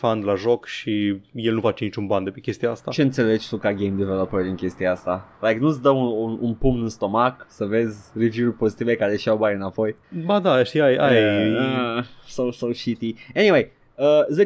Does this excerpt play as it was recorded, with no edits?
yes; 0 cuts

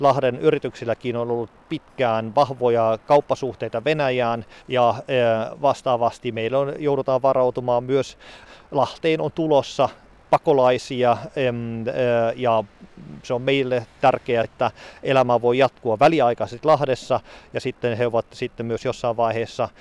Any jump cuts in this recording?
yes; 2 cuts; at 4.6 s, 14.4 s

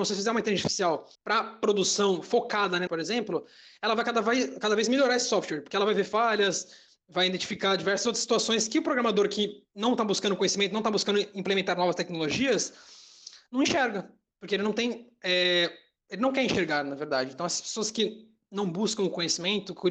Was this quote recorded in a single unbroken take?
no; 2 cuts; at 1.1 s, 2.9 s

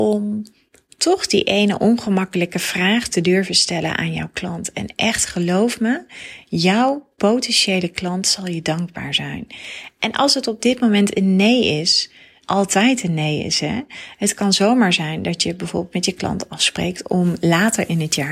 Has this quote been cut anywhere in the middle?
yes; 1 cut; at 12.4 s

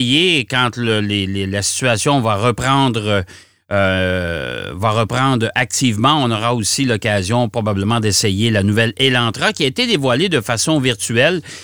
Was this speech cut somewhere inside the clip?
no; 0 cuts

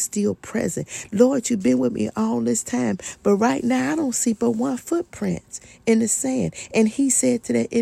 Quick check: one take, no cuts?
no; 1 cut; at 1.1 s

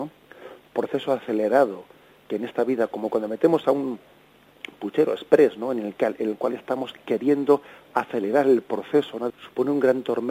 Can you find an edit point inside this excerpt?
yes; 1 cut; at 9.3 s

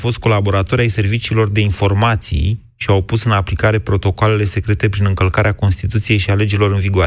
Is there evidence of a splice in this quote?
no; 0 cuts

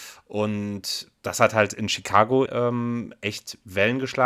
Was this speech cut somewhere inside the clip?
yes; 1 cut; at 2.5 s

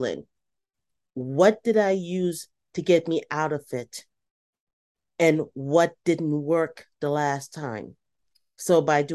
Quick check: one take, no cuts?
no; 1 cut; at 1.1 s

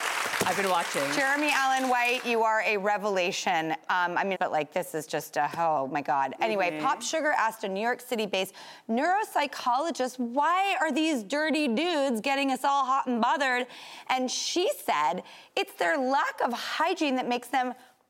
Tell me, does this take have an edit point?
yes; 1 cut; at 4.3 s

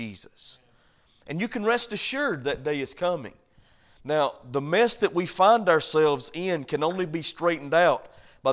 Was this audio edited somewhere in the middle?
no; 0 cuts

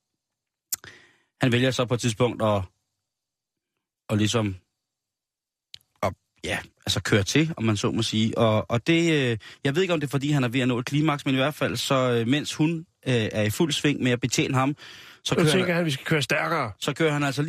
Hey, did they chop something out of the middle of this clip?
no; 0 cuts

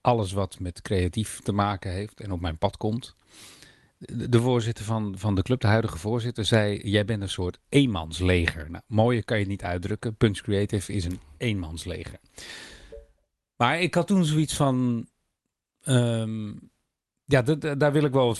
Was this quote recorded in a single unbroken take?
yes; 0 cuts

